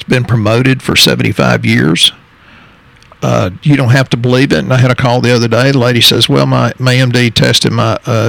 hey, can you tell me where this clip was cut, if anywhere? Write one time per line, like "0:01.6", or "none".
none